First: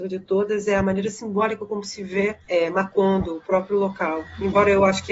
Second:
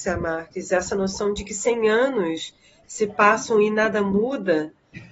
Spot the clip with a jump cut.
first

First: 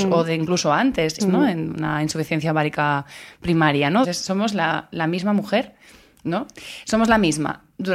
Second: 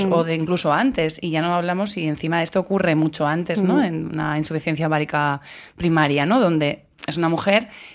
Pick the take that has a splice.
first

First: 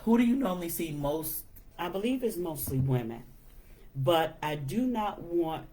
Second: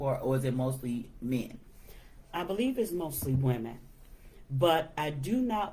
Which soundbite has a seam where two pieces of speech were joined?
first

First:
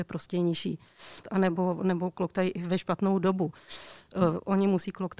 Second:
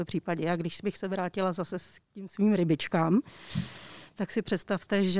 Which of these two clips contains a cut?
first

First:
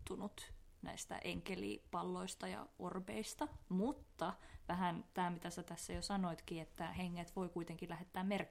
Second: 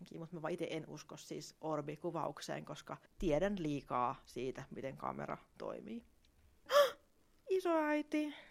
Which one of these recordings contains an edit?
second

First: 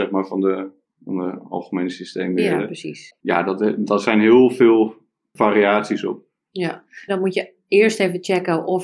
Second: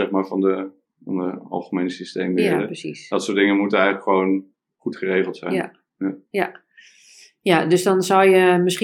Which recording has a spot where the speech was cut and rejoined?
first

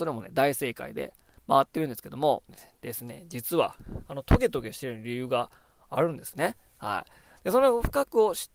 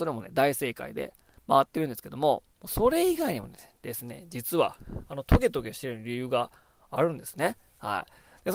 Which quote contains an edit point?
first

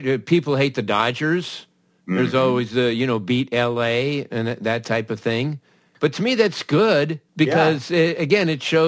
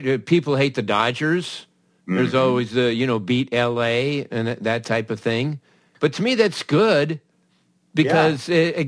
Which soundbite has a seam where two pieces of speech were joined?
first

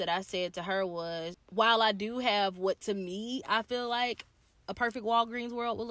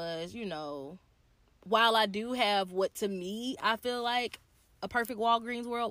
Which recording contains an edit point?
first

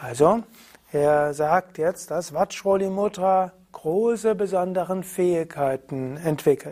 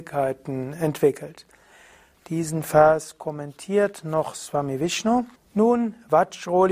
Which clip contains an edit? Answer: second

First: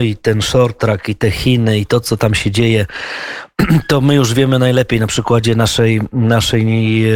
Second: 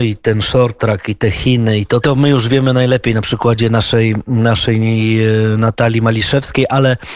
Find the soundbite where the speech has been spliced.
second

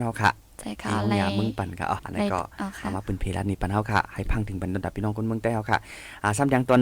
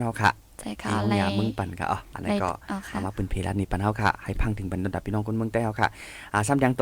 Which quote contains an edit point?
first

